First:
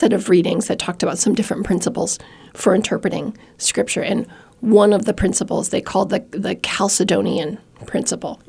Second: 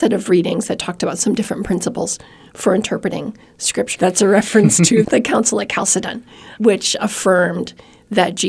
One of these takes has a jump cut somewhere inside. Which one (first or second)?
second